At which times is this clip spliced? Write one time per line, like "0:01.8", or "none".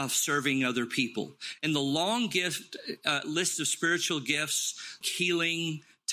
0:05.0